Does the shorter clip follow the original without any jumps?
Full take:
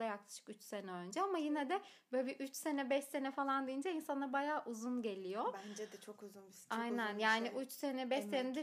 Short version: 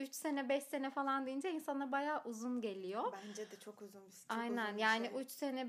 yes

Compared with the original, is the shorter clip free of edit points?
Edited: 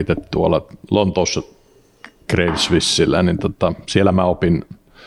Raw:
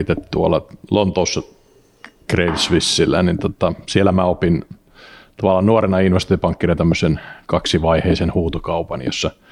yes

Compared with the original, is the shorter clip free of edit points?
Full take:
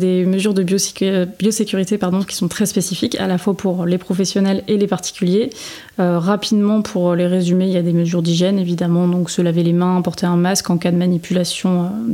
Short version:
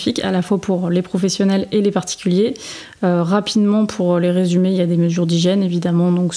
yes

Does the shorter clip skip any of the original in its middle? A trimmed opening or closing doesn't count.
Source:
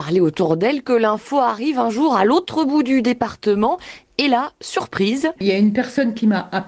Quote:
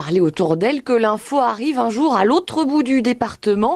no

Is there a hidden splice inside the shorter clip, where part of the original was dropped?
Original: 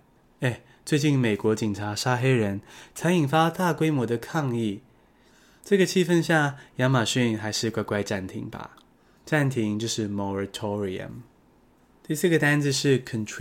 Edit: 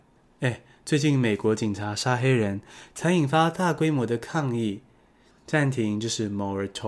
yes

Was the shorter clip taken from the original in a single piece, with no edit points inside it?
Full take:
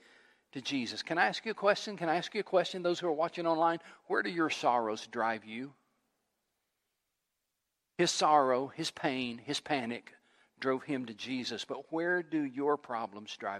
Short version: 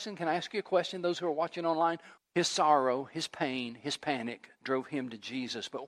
no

